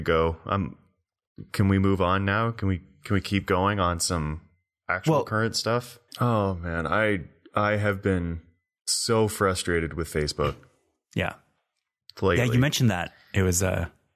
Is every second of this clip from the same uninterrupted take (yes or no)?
no